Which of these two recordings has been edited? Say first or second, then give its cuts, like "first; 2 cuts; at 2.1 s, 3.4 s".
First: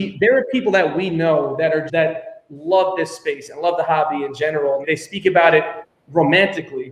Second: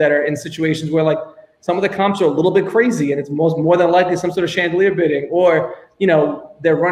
first; 2 cuts; at 1.9 s, 4.8 s